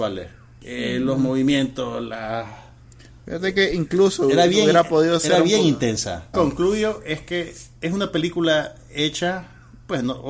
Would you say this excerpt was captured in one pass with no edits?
no; 2 cuts; at 6.3 s, 7.8 s

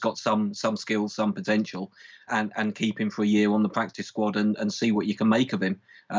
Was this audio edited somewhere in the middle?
yes; 1 cut; at 2.3 s

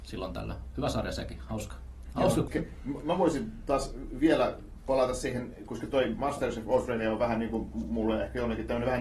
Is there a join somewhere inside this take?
yes; 1 cut; at 2.5 s

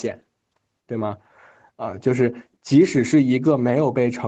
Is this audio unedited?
yes; 0 cuts

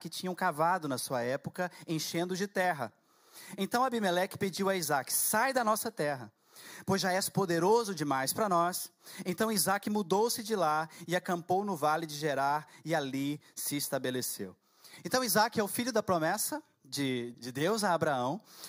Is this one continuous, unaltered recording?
no; 1 cut; at 17.3 s

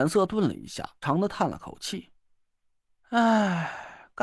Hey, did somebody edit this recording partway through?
yes; 2 cuts; at 1.0 s, 2.2 s

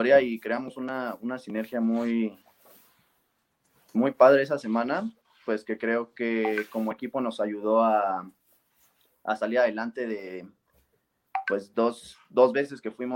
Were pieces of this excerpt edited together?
no; 0 cuts

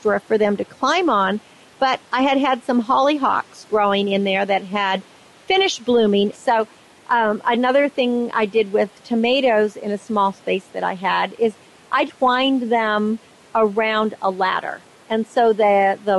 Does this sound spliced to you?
yes; 2 cuts; at 6.3 s, 12.1 s

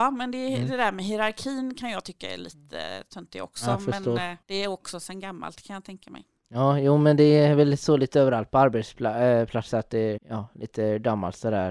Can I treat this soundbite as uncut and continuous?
no; 2 cuts; at 4.4 s, 10.2 s

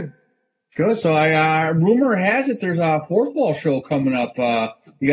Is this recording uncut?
yes; 0 cuts

